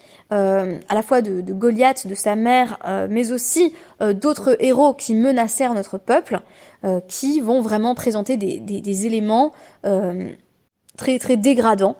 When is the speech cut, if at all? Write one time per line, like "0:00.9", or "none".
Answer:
none